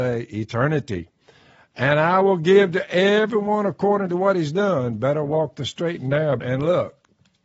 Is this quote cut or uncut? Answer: cut